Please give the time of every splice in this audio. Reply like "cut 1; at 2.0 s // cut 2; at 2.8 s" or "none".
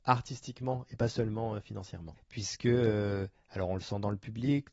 cut 1; at 2.1 s